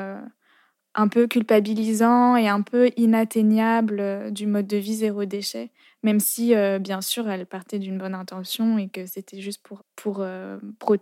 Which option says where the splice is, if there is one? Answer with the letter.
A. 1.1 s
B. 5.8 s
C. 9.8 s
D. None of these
C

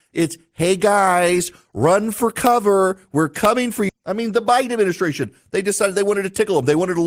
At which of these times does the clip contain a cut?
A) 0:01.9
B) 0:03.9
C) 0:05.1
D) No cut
B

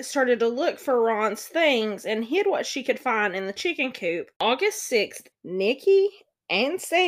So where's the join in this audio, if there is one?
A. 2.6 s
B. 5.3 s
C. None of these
B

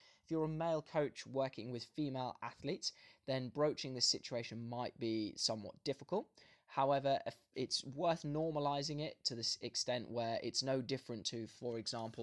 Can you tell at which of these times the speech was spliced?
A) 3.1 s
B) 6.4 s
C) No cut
C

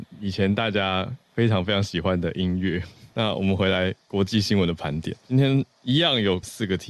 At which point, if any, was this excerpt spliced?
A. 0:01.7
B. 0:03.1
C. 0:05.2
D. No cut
C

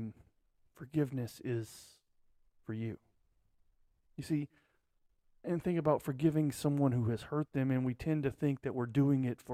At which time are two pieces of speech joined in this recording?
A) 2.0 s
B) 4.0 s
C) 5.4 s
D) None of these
C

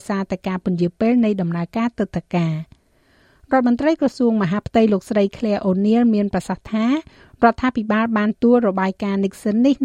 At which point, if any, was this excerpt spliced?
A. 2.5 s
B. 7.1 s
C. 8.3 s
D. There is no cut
C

